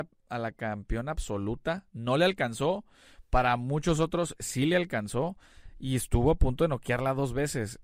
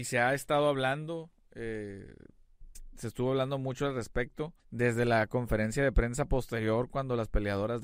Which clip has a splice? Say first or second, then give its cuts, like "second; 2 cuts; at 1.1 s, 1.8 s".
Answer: second; 2 cuts; at 2.7 s, 4.6 s